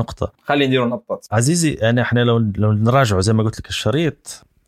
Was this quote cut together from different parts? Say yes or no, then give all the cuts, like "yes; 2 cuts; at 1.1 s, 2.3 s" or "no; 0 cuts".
no; 0 cuts